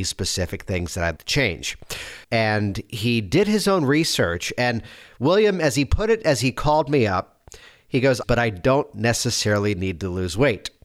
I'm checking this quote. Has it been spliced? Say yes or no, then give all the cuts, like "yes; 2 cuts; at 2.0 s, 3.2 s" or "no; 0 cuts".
yes; 3 cuts; at 1.2 s, 2.2 s, 8.2 s